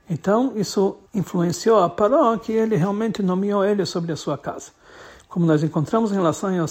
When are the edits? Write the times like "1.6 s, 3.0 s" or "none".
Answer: 1.1 s